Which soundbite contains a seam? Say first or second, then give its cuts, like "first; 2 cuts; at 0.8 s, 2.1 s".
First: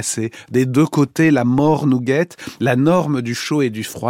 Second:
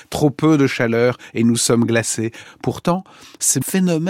second; 1 cut; at 2.4 s